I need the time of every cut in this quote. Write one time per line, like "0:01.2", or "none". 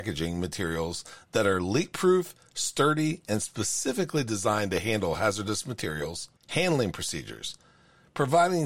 0:06.4